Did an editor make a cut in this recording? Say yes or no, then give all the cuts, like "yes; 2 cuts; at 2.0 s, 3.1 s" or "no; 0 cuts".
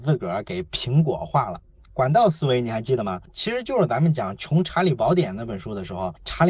yes; 1 cut; at 1.8 s